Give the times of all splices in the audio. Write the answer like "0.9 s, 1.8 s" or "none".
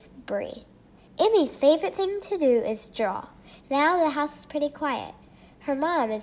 3.6 s